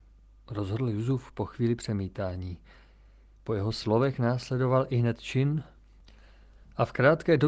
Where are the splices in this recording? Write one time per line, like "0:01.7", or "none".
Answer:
none